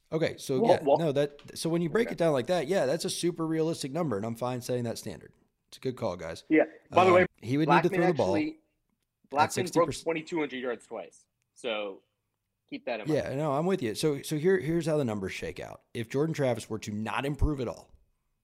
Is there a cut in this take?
yes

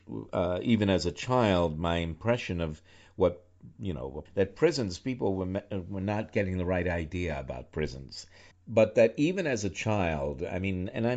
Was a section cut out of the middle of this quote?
yes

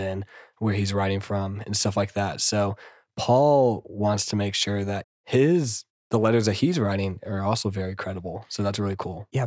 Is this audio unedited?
no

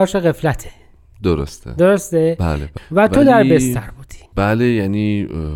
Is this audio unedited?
no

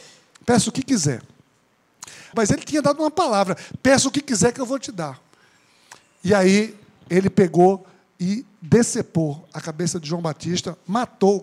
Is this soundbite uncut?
no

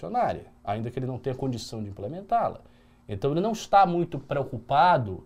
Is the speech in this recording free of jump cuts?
yes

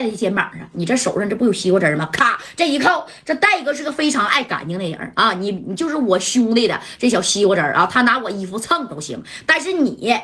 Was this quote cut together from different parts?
no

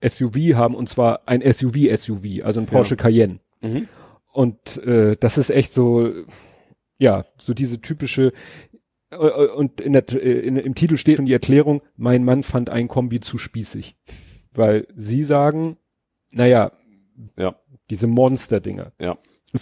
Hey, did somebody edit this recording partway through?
yes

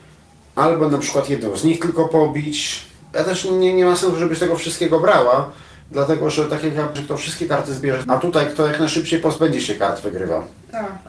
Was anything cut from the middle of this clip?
yes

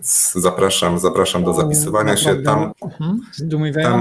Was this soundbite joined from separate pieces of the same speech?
yes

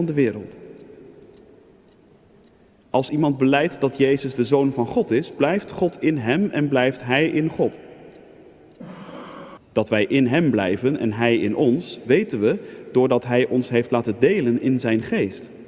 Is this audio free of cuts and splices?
no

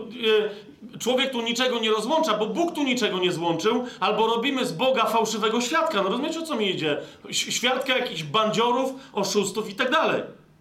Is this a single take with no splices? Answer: yes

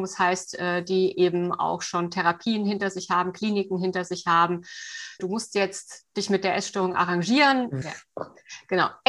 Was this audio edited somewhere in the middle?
yes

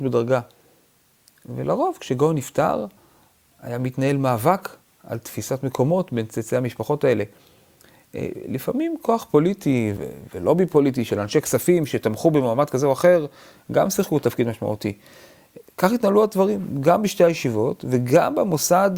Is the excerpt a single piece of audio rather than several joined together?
no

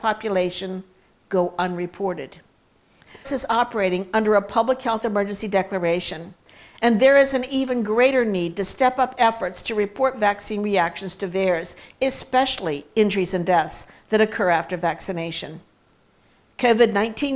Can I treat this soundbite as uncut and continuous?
no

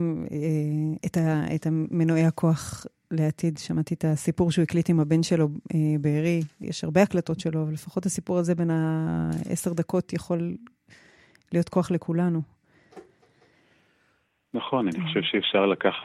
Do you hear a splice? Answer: yes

